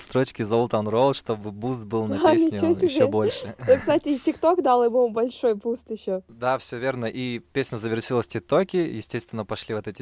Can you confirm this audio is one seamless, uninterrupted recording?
yes; 0 cuts

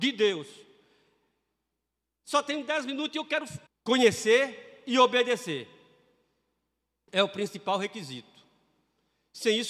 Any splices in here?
yes; 1 cut; at 3.7 s

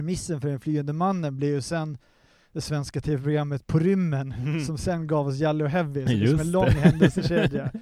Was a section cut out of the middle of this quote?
no; 0 cuts

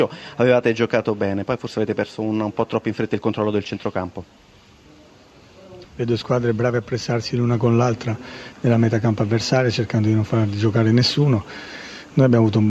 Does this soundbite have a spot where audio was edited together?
yes; 1 cut; at 5.8 s

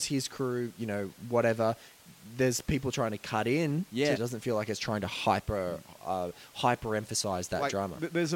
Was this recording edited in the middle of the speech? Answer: yes; 2 cuts; at 4.1 s, 6.0 s

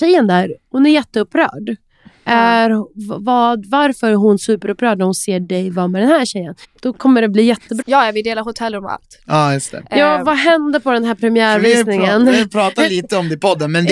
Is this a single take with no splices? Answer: no; 2 cuts; at 6.6 s, 7.8 s

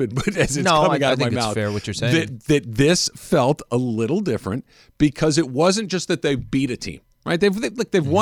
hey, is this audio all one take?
yes; 0 cuts

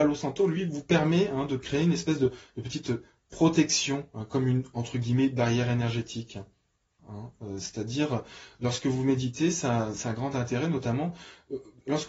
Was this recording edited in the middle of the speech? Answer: yes; 1 cut; at 7.0 s

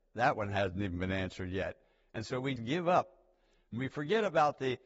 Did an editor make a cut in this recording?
yes; 1 cut; at 2.6 s

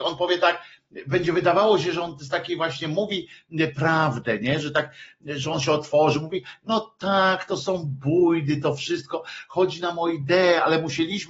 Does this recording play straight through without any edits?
yes; 0 cuts

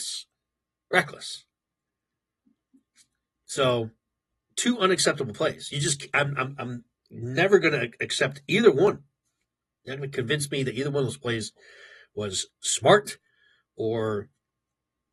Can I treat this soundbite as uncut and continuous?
yes; 0 cuts

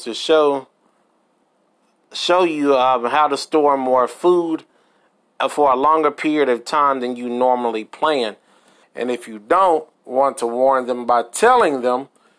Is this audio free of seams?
no; 2 cuts; at 8.8 s, 9.9 s

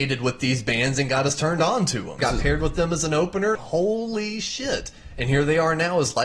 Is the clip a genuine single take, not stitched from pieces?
no; 2 cuts; at 2.2 s, 3.6 s

